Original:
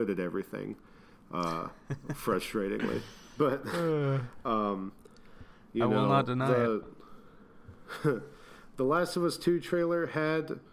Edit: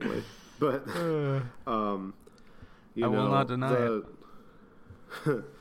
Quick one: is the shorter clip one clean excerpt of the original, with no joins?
yes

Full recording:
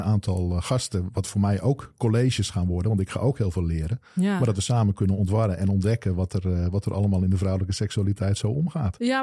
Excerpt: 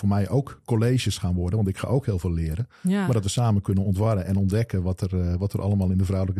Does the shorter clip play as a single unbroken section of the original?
yes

